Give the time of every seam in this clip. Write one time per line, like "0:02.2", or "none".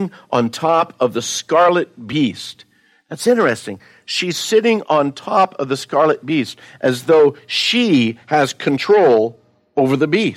none